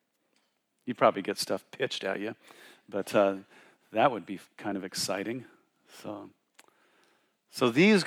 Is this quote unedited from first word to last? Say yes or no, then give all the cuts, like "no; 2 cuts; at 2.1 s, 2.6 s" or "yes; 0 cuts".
yes; 0 cuts